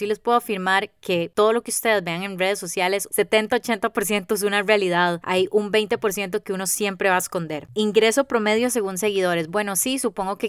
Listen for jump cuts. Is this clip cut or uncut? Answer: cut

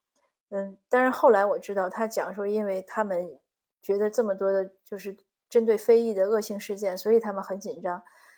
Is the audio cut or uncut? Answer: uncut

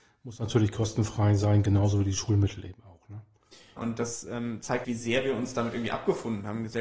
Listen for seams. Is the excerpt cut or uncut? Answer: cut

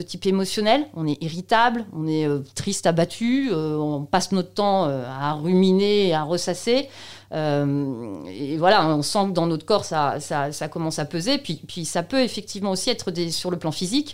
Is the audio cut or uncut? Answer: uncut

